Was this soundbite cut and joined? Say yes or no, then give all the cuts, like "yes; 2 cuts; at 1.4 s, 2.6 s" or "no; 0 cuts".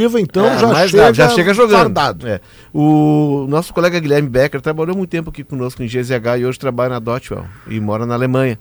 no; 0 cuts